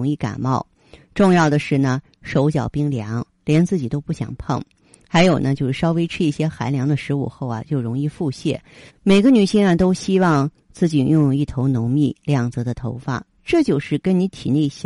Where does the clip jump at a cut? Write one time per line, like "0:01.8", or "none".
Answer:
0:08.9
0:13.3